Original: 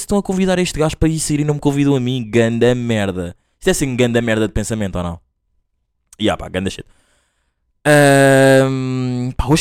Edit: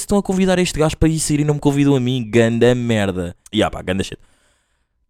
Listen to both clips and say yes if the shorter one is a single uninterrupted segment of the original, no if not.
no